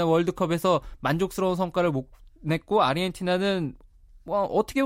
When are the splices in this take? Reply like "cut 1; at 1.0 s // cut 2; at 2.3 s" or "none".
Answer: none